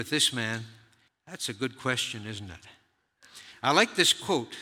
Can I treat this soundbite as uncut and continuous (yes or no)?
no